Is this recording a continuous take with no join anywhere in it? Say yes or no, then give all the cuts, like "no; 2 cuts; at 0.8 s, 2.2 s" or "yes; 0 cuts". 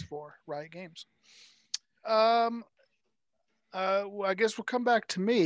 no; 1 cut; at 2.0 s